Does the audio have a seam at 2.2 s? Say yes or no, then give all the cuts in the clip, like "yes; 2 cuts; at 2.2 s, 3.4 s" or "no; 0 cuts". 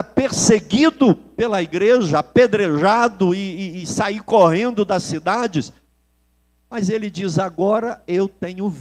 no; 0 cuts